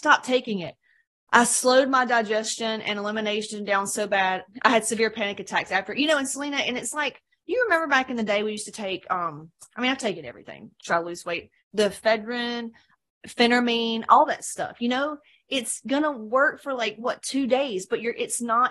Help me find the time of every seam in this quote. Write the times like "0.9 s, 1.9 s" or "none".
none